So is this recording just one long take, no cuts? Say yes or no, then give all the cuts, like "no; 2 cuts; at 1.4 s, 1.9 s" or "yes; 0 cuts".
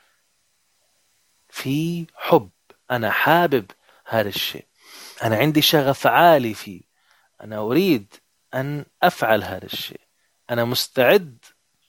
no; 1 cut; at 5.1 s